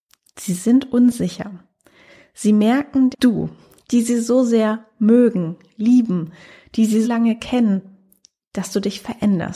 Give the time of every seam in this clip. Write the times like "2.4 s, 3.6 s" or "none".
3.1 s, 7.0 s